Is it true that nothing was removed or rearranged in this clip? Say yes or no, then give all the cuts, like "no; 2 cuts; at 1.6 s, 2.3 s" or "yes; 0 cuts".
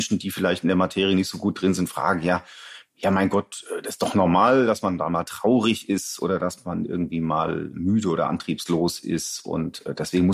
yes; 0 cuts